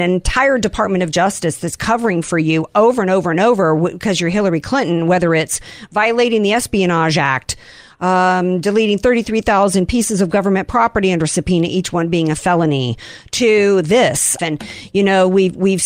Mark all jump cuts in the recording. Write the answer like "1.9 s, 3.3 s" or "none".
14.4 s